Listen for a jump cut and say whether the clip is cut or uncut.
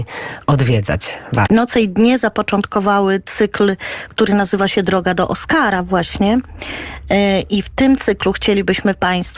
cut